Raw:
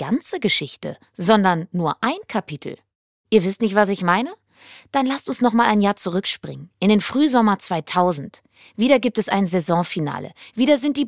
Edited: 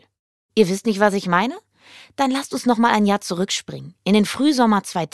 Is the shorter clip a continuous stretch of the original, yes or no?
yes